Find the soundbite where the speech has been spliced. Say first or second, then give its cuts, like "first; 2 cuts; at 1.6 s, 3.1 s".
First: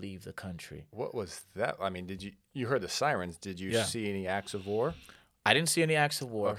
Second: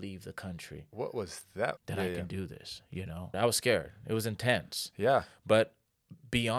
second; 2 cuts; at 1.8 s, 3.3 s